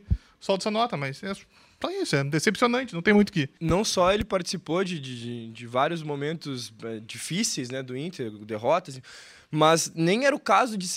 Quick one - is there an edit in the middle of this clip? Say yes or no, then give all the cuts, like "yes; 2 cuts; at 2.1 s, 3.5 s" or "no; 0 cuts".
no; 0 cuts